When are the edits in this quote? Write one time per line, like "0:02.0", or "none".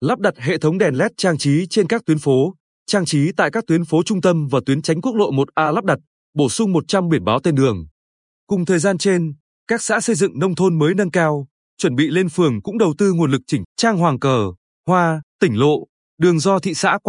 0:13.6
0:15.3